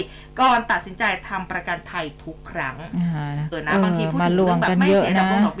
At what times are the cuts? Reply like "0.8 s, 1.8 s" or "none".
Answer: 3.5 s